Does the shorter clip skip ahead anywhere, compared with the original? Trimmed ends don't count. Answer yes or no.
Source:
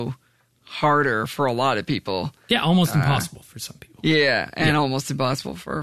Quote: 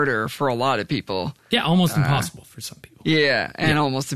no